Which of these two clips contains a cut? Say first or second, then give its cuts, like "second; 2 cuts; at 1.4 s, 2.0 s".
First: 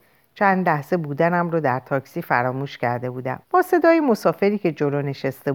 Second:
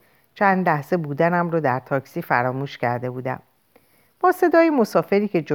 first; 1 cut; at 3.4 s